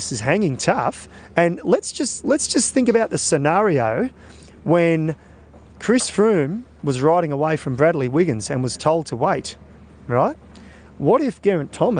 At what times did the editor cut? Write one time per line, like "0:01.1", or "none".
none